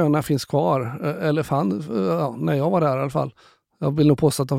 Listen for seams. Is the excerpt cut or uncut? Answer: uncut